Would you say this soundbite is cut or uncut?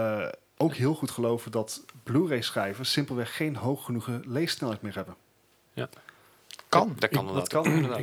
uncut